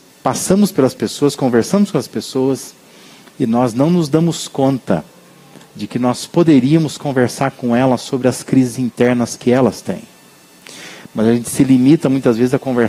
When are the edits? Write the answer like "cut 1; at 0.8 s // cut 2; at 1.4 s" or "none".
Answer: none